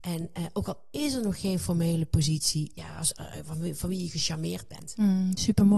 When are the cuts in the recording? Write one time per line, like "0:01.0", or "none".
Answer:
0:02.8